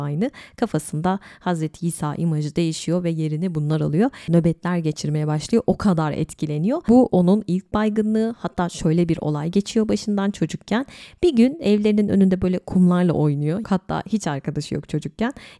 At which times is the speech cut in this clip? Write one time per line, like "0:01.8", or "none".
0:04.3
0:13.6